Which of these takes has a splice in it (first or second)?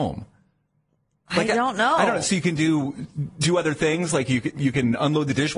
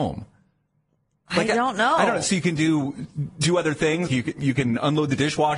second